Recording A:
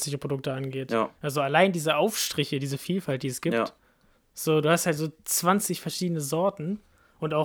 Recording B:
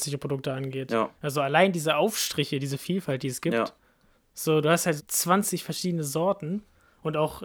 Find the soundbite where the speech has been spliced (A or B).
B